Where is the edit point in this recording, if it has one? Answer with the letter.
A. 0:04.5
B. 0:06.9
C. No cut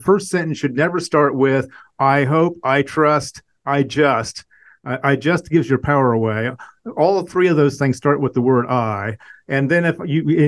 C